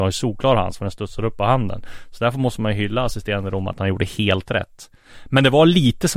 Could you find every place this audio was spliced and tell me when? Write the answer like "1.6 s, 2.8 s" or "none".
none